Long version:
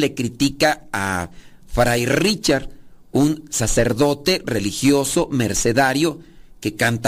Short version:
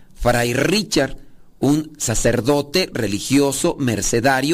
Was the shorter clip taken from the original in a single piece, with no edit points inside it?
yes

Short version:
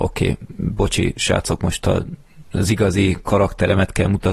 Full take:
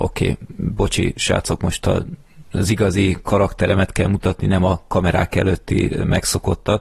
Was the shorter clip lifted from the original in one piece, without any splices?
yes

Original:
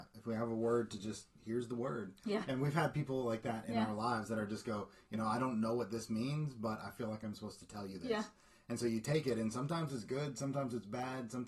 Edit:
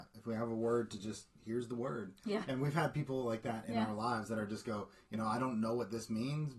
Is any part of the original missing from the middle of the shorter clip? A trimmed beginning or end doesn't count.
no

